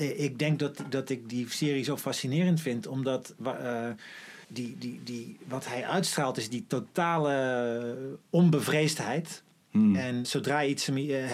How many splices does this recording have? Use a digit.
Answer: 2